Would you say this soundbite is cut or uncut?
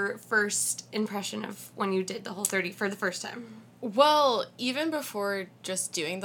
uncut